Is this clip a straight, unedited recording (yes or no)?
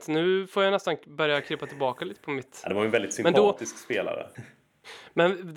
no